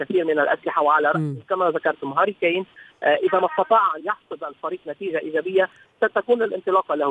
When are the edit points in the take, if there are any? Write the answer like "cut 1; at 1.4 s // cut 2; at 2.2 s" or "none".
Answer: cut 1; at 4.0 s

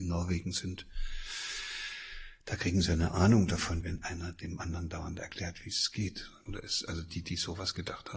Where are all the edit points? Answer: cut 1; at 3.8 s // cut 2; at 6.5 s

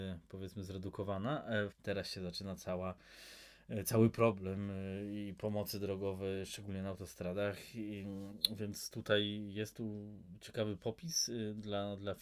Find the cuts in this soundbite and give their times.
cut 1; at 1.7 s

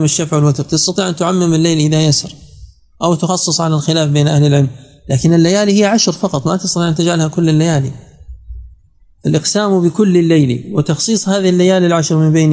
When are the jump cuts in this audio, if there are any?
none

